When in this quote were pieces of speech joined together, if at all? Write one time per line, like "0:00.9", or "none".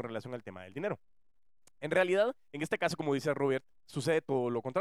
none